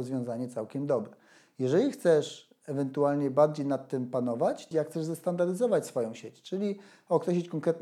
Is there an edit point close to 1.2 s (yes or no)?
no